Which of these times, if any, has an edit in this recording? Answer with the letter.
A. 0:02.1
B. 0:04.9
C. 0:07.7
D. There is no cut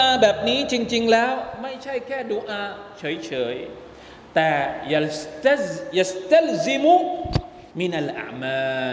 C